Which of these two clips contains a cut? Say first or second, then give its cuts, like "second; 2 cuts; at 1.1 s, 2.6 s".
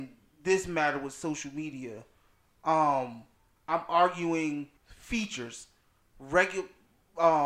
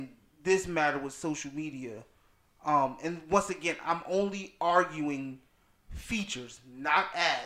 first; 2 cuts; at 2.5 s, 4.8 s